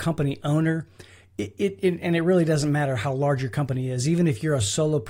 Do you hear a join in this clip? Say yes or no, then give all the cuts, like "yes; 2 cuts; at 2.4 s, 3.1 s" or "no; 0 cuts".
no; 0 cuts